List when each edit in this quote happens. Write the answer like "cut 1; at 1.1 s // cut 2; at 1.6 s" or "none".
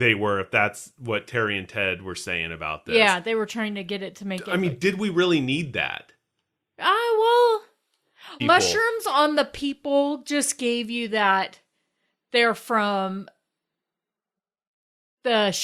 cut 1; at 8.4 s